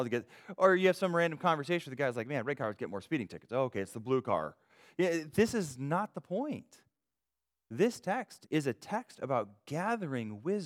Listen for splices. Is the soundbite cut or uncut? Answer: cut